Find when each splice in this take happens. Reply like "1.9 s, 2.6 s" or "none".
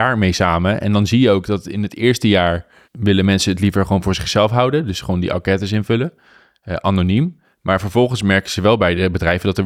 2.8 s